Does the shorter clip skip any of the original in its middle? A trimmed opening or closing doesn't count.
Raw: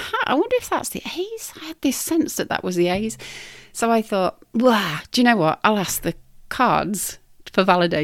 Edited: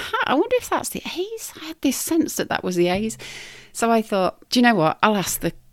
yes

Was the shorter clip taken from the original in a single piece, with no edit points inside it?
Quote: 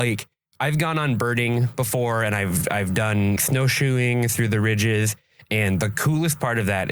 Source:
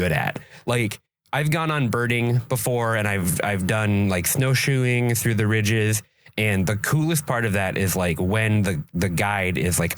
no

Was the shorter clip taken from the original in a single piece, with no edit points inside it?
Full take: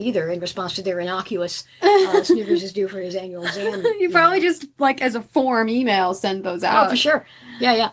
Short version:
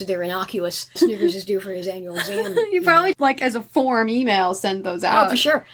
no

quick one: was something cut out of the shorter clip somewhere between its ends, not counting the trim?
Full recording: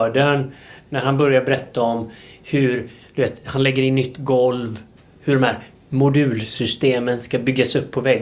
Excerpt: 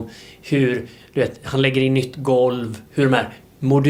yes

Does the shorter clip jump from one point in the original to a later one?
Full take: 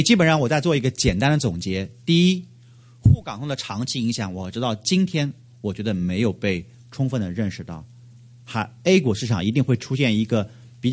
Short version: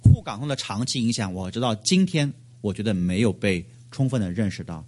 no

